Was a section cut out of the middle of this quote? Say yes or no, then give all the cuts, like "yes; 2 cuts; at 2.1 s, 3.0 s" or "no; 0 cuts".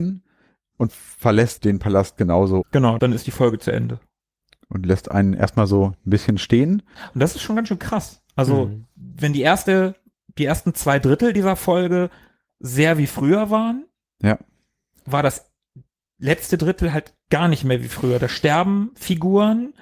yes; 1 cut; at 2.6 s